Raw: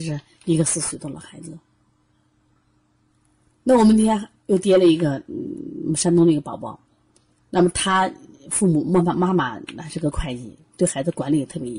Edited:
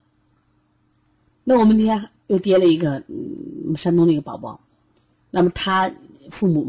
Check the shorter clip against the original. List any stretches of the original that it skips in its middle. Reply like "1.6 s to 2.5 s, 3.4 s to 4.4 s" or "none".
none